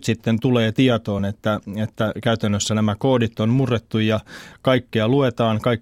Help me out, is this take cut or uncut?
uncut